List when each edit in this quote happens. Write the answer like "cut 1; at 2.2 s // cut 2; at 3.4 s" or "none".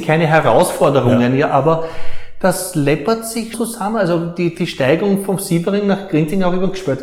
cut 1; at 3.5 s // cut 2; at 4.5 s